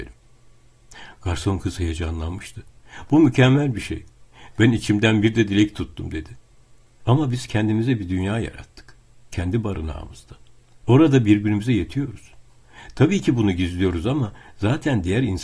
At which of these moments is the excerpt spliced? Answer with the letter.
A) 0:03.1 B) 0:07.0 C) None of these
B